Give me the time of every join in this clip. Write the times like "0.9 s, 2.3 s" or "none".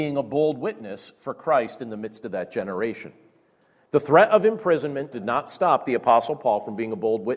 5.1 s